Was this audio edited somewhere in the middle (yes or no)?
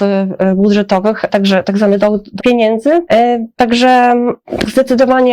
yes